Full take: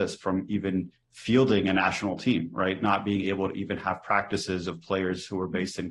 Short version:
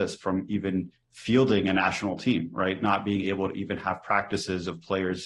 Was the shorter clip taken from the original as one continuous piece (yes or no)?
yes